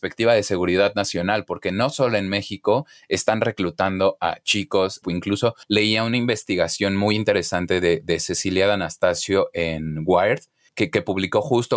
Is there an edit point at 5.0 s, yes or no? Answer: yes